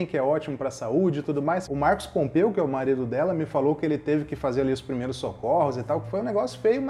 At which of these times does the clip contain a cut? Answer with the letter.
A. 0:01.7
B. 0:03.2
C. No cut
A